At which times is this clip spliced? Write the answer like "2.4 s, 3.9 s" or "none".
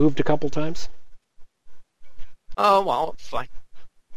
2.5 s

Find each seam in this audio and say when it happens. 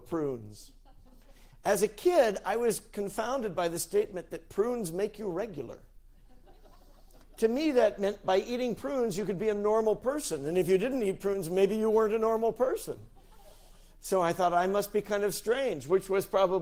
none

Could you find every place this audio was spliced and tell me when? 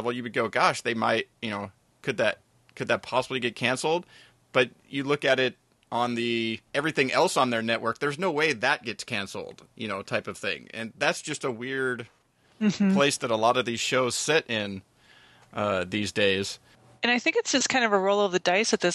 6.7 s

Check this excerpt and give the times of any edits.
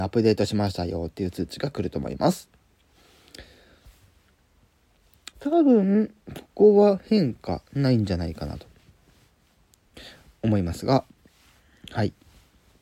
5.3 s

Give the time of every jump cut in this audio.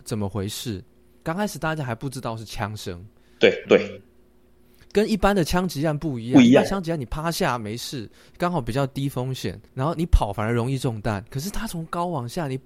1.2 s, 3.7 s, 9.7 s

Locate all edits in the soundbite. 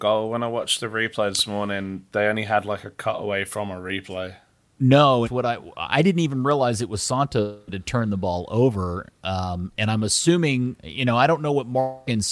5.2 s

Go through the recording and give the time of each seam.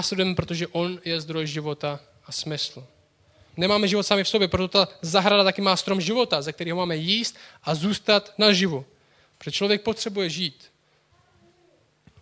3.5 s

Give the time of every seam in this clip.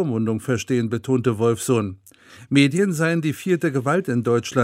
none

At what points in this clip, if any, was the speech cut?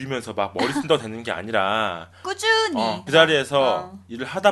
3.1 s

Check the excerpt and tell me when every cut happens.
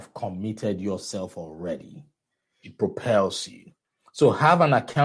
2.6 s

